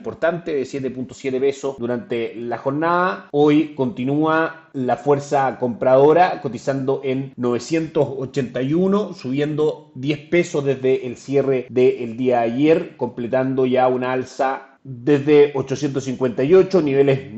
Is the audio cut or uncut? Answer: uncut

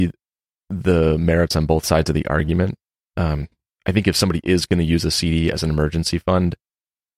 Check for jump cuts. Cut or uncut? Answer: uncut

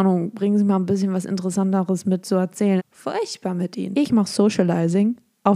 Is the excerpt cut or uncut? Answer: cut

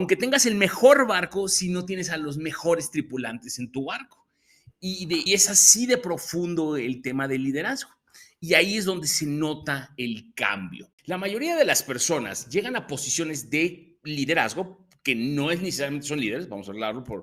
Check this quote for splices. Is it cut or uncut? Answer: cut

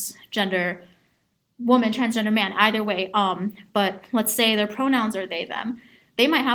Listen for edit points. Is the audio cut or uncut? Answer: uncut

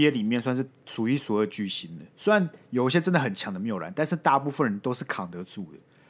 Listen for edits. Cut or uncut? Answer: uncut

